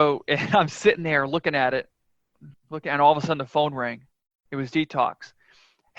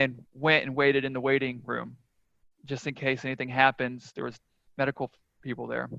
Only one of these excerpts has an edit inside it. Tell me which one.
first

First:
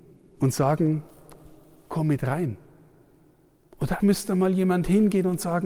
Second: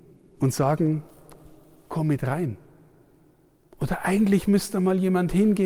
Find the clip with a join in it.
first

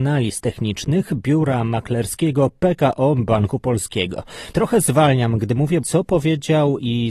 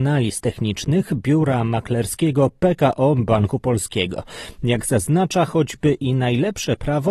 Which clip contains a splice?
first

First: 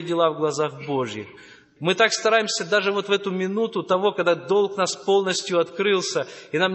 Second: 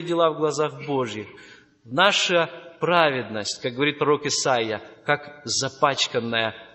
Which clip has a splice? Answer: first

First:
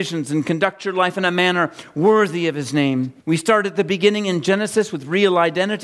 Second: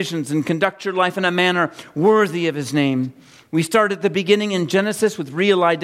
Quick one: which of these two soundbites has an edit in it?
first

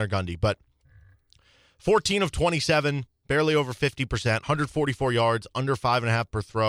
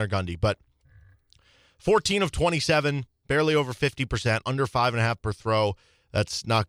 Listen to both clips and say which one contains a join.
second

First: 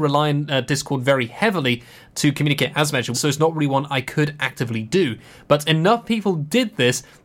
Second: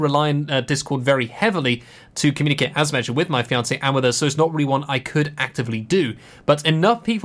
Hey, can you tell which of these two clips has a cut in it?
first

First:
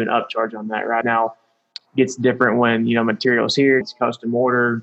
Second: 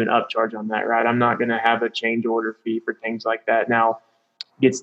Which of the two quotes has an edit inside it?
first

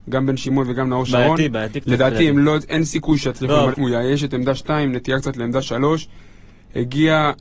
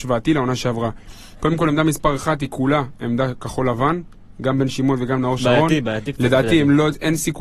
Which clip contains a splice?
first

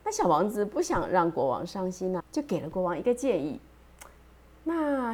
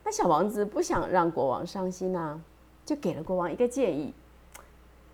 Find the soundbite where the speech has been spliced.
first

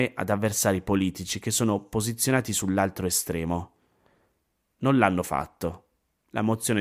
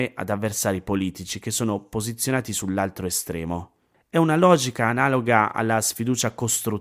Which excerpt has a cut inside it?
second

